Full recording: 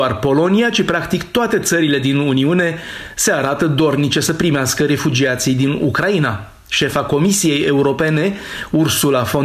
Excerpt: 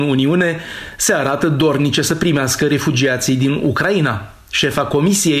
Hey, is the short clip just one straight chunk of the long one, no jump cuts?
yes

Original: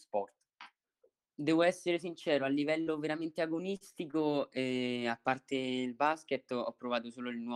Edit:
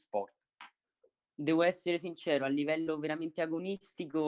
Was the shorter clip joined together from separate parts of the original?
no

